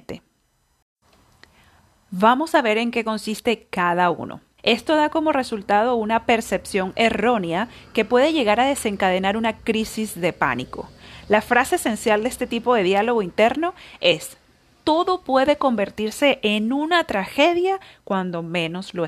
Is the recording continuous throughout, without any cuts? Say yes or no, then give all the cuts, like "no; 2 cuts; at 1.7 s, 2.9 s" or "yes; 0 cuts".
no; 1 cut; at 4.6 s